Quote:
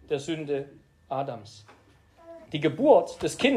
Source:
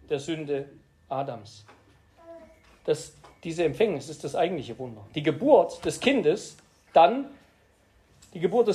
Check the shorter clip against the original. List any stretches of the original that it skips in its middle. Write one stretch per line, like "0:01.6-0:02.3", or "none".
0:02.5-0:05.1